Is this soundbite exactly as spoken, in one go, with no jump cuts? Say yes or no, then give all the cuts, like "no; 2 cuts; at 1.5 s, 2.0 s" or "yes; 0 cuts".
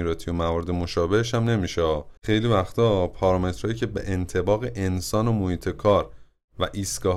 no; 1 cut; at 2.2 s